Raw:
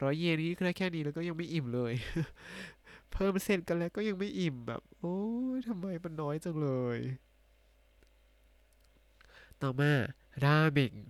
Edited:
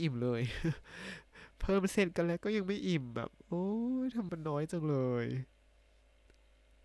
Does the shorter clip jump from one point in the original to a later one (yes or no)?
yes